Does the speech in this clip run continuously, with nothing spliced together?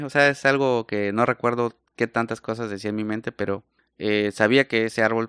yes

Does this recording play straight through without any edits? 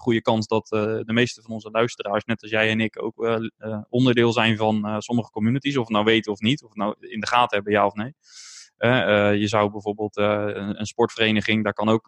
yes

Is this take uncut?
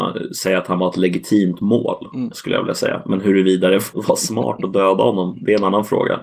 no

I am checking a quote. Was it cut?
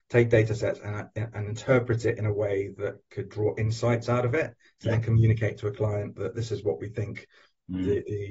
no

